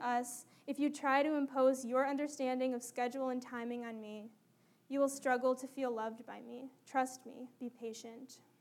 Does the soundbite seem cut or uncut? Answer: uncut